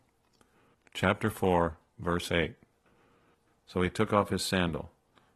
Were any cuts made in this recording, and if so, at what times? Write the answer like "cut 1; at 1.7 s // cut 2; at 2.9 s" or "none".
cut 1; at 3.5 s